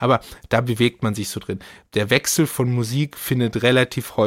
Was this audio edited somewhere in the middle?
no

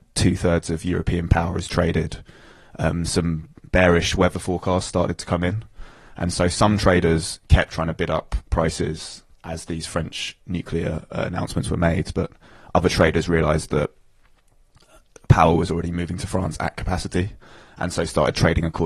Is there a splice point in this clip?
no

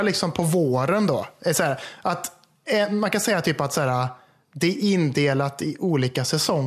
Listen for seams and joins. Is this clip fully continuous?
yes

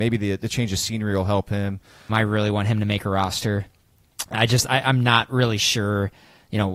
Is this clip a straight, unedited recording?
no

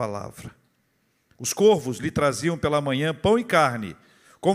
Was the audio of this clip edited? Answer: yes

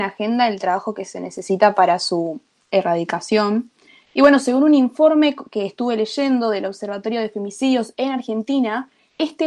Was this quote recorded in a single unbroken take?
yes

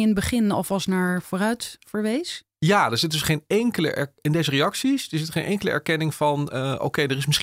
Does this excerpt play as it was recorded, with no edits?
yes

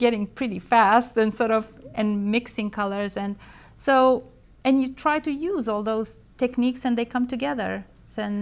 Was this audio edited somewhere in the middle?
no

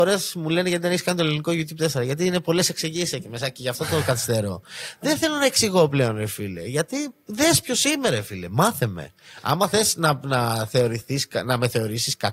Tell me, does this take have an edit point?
no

